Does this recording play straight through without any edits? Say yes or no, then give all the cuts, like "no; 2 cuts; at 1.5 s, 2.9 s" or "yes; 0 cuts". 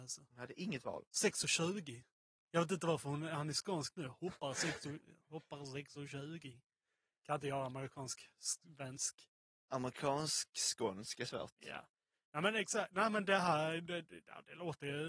yes; 0 cuts